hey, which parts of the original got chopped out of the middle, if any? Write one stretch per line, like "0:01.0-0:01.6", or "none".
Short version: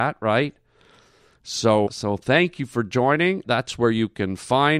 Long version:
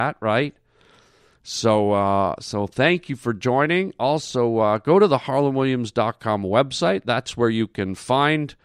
0:01.9-0:02.4
0:03.9-0:07.0